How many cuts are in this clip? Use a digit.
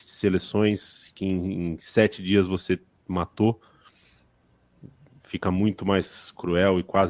0